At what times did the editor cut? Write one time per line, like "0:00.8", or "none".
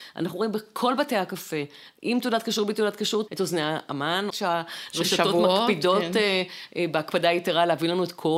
0:03.3
0:04.3